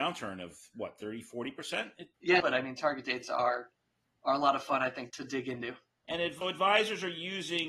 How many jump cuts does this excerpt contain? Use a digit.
3